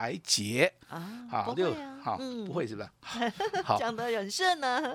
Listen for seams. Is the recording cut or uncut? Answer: uncut